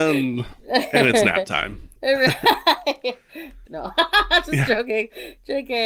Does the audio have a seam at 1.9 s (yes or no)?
no